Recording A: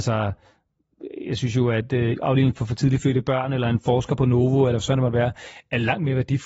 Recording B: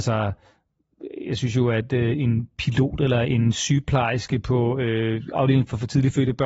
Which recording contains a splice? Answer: A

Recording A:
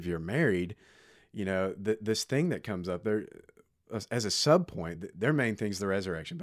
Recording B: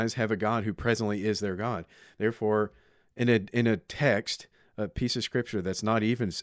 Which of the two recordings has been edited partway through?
A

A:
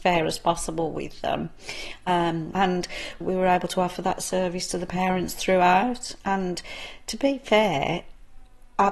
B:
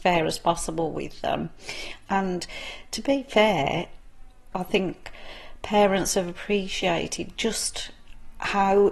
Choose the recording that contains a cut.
B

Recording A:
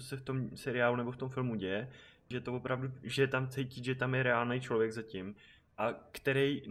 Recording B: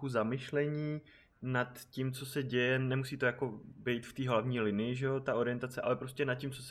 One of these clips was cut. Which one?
A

